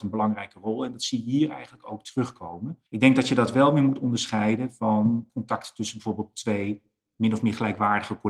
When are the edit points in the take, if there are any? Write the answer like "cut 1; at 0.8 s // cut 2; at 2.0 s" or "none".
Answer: cut 1; at 2.9 s // cut 2; at 5.3 s